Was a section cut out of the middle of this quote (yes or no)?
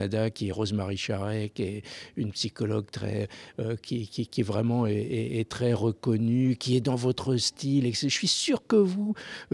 no